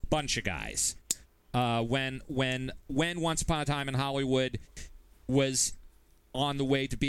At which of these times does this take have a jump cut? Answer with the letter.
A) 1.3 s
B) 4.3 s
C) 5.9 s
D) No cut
D